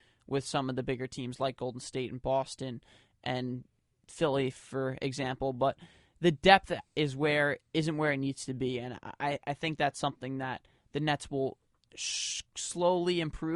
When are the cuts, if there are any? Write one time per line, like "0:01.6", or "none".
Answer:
none